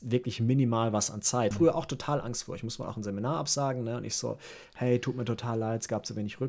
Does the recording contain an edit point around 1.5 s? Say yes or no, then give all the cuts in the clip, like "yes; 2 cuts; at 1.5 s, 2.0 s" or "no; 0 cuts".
yes; 1 cut; at 1.5 s